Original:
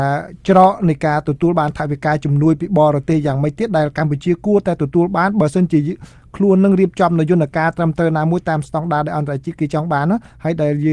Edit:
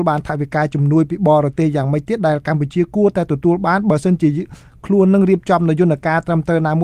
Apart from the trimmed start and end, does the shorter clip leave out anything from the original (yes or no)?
no